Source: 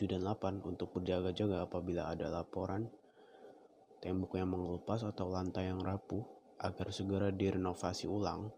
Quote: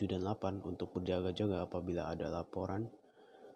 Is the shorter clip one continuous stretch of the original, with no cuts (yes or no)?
yes